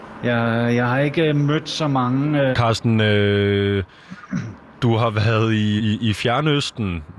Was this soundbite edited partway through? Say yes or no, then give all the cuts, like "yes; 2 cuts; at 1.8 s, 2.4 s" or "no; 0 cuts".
yes; 2 cuts; at 2.5 s, 5.8 s